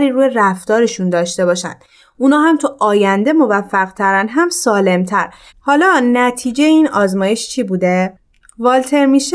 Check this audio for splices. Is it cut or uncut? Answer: cut